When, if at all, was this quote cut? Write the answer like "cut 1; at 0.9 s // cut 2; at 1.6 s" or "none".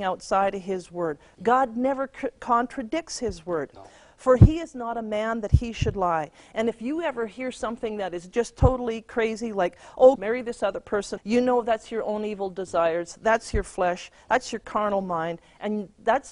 cut 1; at 10.2 s // cut 2; at 11.2 s

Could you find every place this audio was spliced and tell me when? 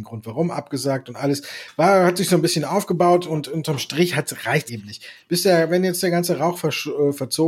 cut 1; at 4.7 s

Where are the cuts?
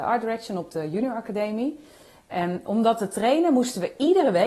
cut 1; at 2.3 s

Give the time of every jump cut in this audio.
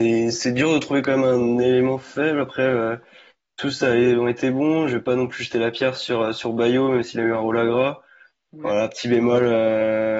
none

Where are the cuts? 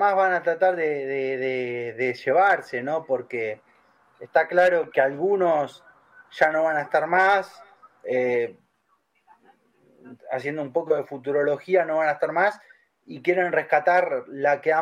cut 1; at 4.9 s

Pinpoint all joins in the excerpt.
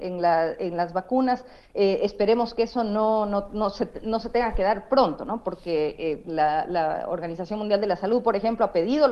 none

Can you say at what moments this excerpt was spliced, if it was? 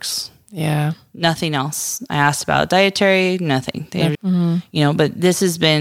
cut 1; at 4.1 s

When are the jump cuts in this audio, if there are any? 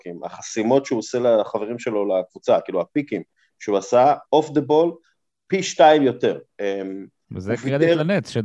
cut 1; at 6.5 s

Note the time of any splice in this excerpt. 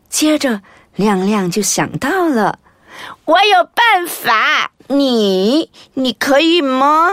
cut 1; at 4.8 s

